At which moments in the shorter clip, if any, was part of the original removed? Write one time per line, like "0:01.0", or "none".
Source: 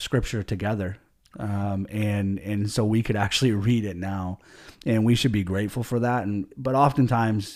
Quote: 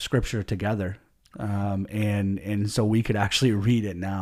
none

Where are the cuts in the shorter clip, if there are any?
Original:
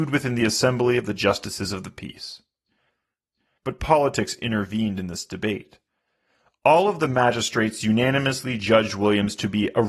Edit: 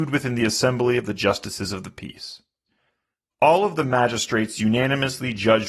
0:03.3

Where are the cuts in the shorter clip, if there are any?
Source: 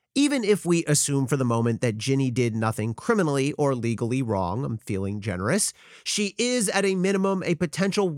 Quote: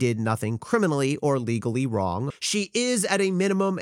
0:02.3

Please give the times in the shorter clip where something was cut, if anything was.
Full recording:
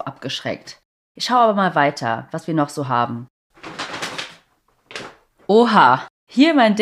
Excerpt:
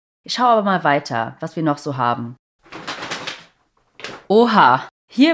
0:04.2

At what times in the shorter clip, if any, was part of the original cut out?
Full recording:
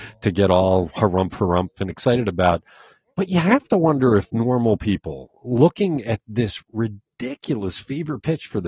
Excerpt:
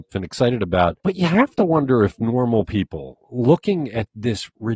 0:01.0

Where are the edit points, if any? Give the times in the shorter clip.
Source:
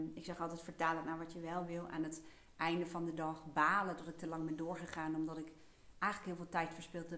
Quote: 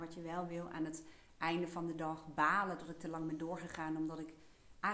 none

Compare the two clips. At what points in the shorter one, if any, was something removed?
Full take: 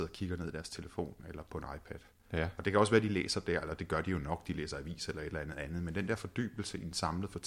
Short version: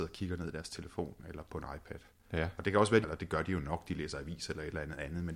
0:03.0

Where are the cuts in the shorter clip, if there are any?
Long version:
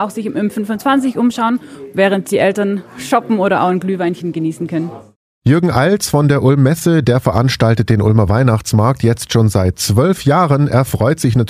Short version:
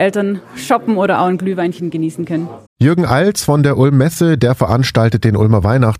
0:02.7

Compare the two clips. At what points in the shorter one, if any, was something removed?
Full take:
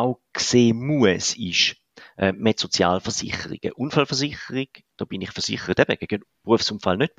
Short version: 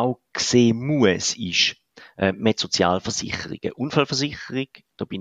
none

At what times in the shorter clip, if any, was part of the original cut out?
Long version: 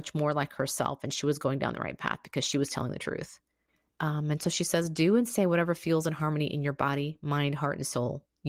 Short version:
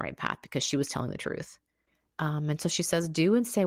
none

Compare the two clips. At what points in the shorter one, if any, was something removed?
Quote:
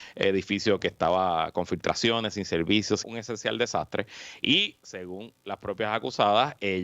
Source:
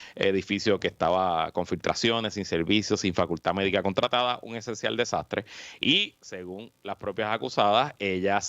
0:03.0

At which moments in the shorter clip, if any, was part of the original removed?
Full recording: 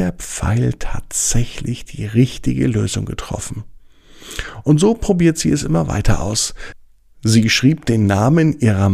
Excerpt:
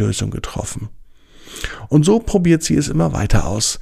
none

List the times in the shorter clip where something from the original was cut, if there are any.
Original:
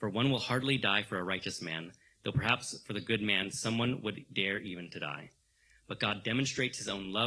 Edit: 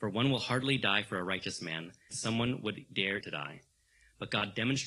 0:02.1
0:03.2

